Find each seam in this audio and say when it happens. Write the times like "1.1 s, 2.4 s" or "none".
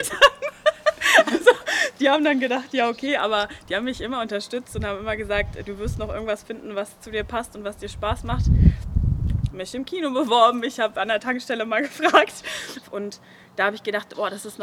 9.5 s, 12.8 s